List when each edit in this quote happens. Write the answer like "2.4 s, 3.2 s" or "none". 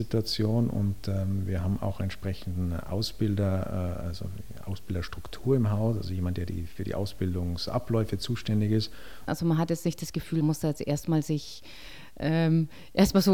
9.3 s, 10.4 s